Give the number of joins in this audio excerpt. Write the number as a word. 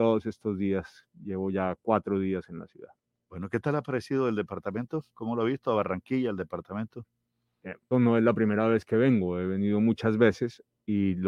one